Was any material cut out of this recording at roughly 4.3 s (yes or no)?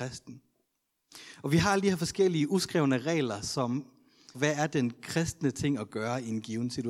yes